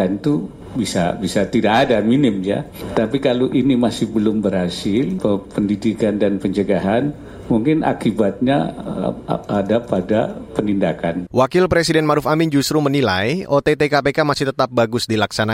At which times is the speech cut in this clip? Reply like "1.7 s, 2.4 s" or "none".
11.3 s